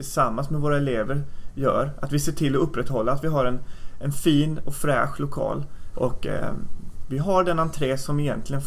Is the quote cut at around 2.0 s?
no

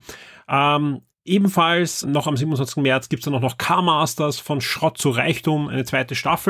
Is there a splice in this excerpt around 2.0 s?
yes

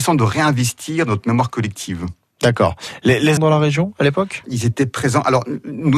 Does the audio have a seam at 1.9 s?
no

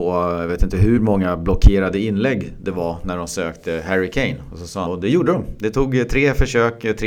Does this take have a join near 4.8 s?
yes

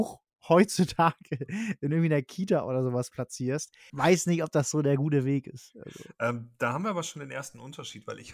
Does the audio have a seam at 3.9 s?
yes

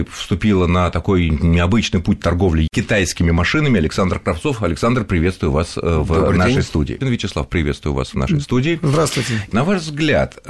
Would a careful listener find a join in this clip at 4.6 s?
no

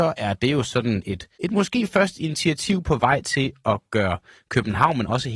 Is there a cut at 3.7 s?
no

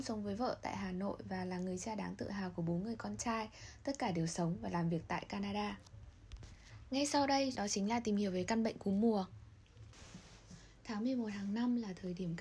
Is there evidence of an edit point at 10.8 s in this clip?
no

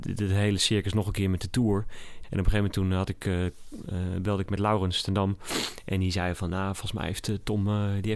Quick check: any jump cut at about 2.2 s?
yes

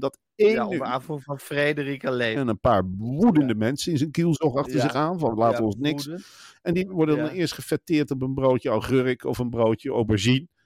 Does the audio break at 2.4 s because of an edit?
yes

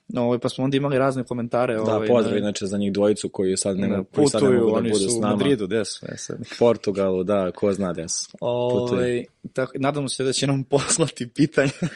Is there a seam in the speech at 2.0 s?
no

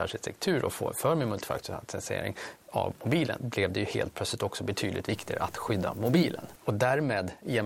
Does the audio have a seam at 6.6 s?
yes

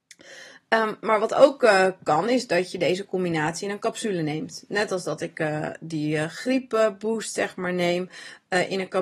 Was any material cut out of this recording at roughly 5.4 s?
no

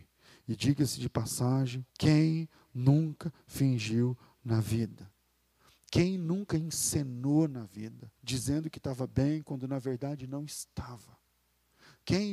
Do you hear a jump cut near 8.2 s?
yes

